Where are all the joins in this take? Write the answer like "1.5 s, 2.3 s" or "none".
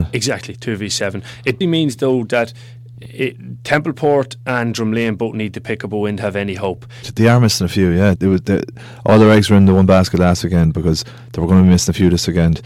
1.6 s, 7.0 s, 8.2 s